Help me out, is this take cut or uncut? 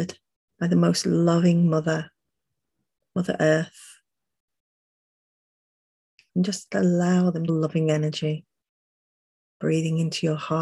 cut